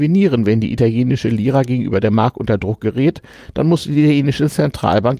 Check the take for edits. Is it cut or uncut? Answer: uncut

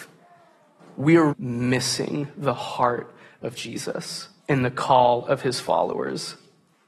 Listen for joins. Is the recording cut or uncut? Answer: cut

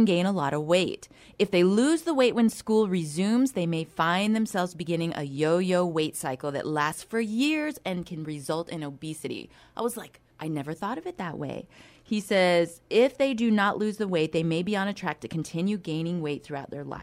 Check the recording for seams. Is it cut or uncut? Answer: cut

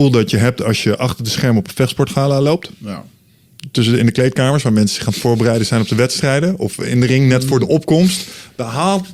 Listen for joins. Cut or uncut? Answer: uncut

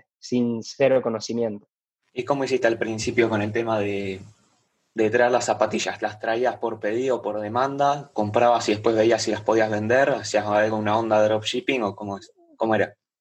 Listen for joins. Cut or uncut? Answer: uncut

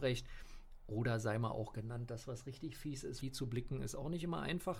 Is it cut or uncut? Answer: cut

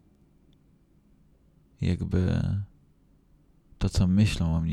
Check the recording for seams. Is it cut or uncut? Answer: uncut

